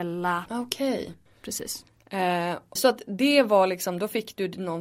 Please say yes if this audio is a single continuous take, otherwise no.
no